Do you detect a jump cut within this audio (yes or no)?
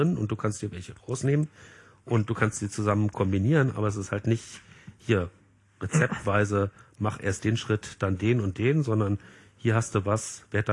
no